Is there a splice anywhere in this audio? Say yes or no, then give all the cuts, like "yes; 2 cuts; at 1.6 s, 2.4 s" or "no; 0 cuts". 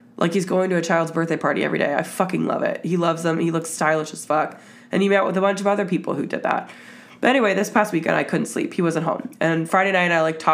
no; 0 cuts